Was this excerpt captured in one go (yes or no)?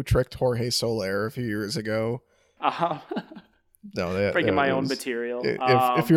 no